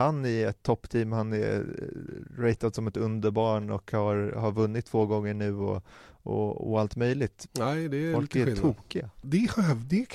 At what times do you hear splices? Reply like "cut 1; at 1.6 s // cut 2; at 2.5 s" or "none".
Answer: cut 1; at 7.5 s // cut 2; at 9.2 s